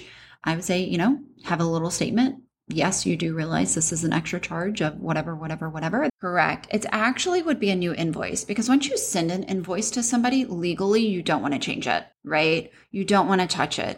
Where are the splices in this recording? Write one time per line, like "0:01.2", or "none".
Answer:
0:06.1
0:12.1